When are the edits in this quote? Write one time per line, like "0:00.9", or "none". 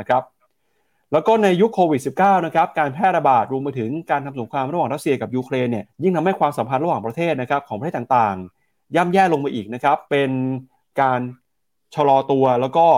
0:05.8
0:10.1